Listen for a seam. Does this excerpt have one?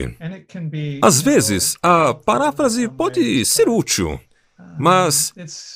no; 0 cuts

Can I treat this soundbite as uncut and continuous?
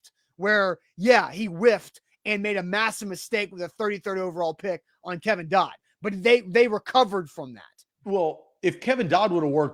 no; 1 cut; at 7.9 s

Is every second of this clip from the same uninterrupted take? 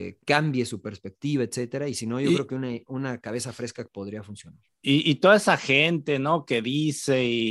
yes; 0 cuts

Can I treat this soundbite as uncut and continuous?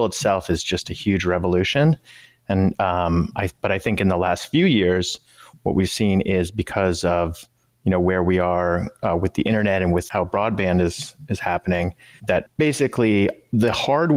yes; 0 cuts

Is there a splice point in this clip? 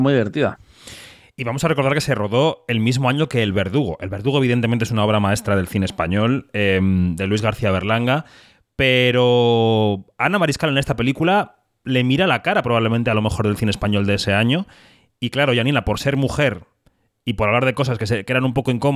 no; 0 cuts

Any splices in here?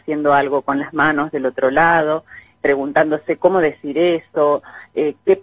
no; 0 cuts

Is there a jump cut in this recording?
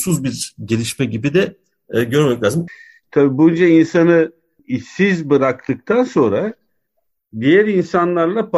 yes; 1 cut; at 2.7 s

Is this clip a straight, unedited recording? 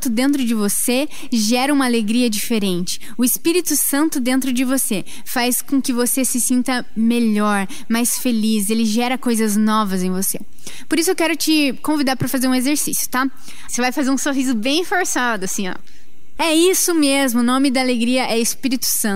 no; 2 cuts; at 13.7 s, 16.4 s

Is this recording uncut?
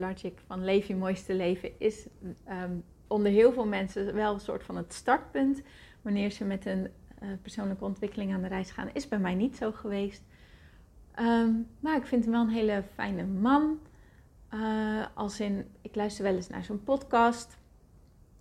no; 1 cut; at 3.1 s

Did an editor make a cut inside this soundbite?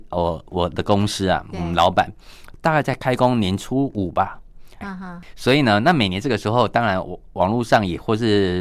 yes; 1 cut; at 4.8 s

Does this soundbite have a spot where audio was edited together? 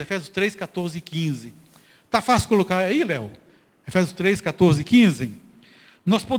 no; 0 cuts

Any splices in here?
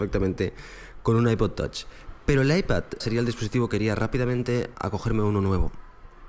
yes; 2 cuts; at 3.0 s, 4.7 s

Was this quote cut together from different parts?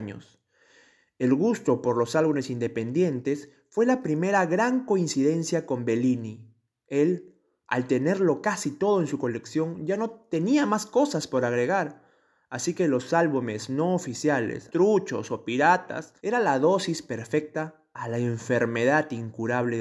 yes; 2 cuts; at 14.7 s, 16.2 s

